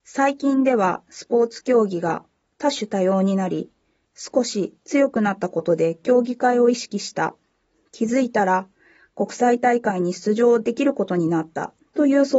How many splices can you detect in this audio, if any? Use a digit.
1